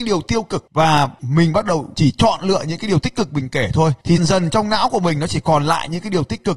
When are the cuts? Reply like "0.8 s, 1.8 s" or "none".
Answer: 4.2 s